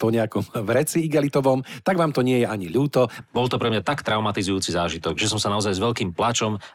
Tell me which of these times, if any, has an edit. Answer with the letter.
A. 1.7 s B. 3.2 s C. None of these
B